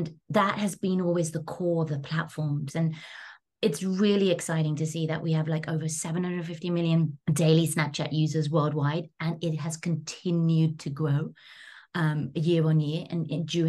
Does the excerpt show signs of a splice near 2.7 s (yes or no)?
yes